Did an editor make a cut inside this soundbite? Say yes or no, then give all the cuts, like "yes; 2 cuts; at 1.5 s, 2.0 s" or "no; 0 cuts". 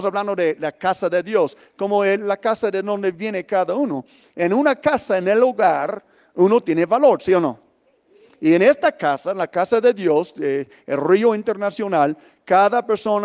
no; 0 cuts